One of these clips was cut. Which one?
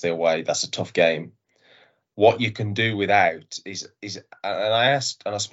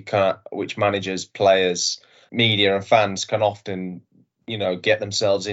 second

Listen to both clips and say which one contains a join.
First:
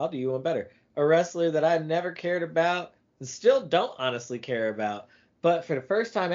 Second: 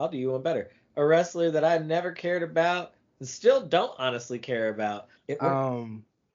second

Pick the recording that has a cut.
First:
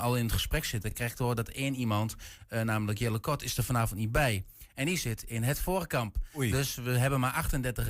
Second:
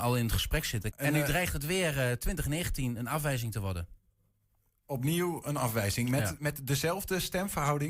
second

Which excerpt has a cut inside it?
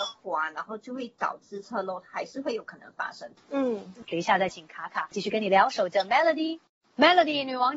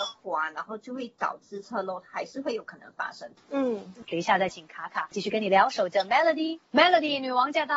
second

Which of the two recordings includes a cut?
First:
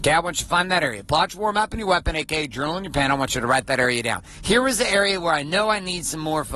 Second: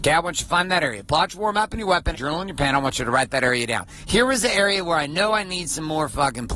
second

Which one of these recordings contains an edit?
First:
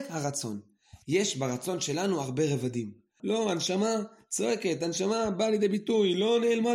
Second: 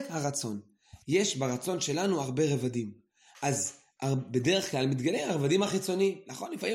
first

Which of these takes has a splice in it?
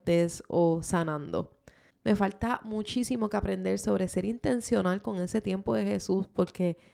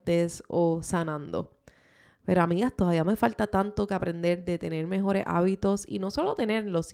first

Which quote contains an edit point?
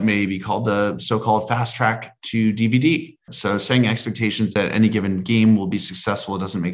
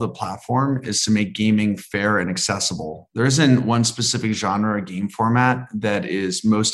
first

